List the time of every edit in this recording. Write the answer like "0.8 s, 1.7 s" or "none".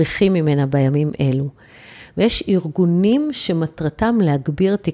2.1 s